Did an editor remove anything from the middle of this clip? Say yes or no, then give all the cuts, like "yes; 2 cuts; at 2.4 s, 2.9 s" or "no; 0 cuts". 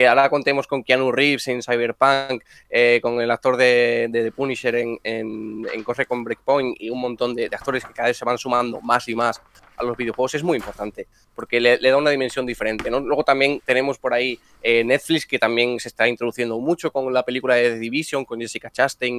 no; 0 cuts